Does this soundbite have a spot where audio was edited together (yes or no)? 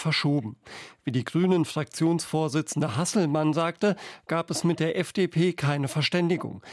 no